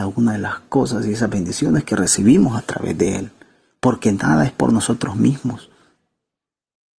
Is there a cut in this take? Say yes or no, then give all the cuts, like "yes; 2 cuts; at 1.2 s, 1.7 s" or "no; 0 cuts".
no; 0 cuts